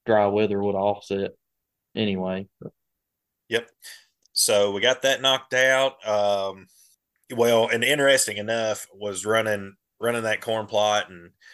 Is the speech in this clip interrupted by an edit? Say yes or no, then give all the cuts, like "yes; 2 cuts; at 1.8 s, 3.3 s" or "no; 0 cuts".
no; 0 cuts